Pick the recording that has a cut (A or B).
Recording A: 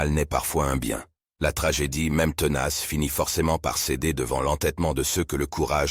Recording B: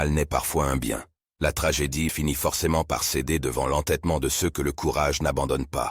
B